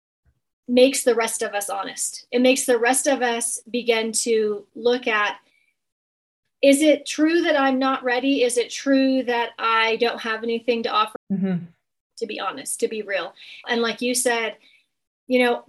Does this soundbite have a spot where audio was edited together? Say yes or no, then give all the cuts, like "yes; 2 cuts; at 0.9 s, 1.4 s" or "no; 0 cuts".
yes; 2 cuts; at 11.2 s, 13.6 s